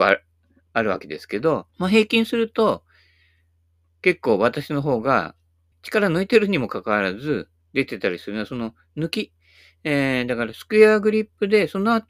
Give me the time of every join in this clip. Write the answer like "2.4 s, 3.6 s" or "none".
1.7 s, 5.7 s